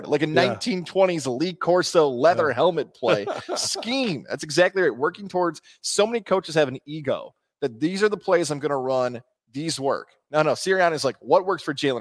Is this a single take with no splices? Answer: yes; 0 cuts

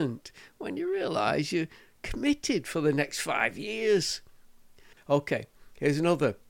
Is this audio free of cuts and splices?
no; 1 cut; at 4.9 s

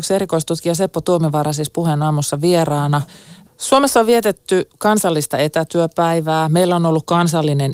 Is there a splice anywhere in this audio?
no; 0 cuts

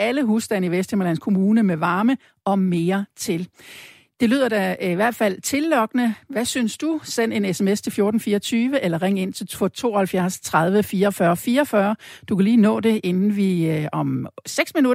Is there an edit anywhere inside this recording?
no; 0 cuts

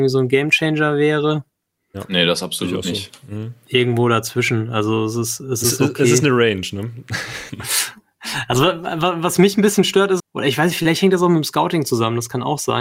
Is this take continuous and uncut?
no; 2 cuts; at 7.5 s, 10.2 s

